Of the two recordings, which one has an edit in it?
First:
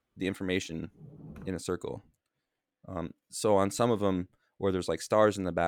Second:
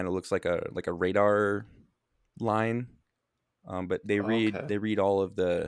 second; 1 cut; at 4.0 s

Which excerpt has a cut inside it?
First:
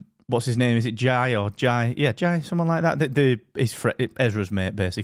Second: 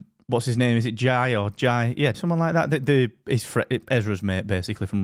second; 1 cut; at 2.1 s

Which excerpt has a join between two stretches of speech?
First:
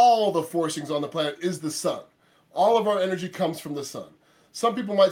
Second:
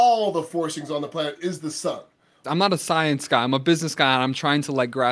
second; 1 cut; at 2.4 s

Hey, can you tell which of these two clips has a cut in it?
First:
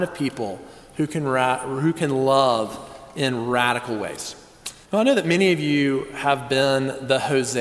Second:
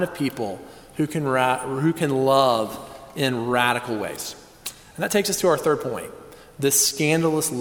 first; 1 cut; at 4.8 s

